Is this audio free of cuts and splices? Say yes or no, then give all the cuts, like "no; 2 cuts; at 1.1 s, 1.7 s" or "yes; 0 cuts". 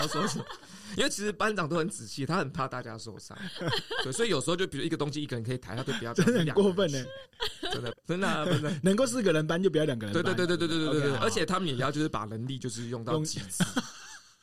no; 1 cut; at 7.9 s